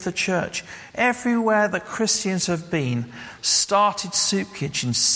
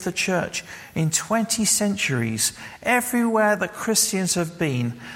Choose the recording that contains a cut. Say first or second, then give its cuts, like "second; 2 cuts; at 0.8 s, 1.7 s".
first; 2 cuts; at 0.9 s, 3.4 s